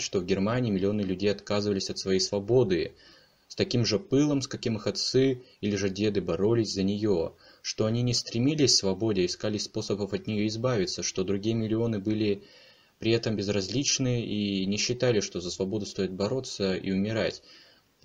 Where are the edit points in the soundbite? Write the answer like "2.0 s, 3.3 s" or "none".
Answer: none

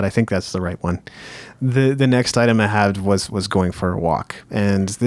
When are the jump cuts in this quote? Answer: none

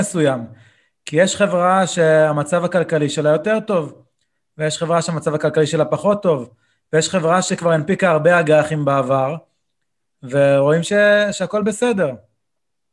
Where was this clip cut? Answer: none

